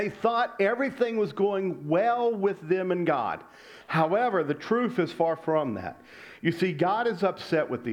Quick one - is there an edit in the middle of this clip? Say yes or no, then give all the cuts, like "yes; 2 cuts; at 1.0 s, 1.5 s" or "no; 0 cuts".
no; 0 cuts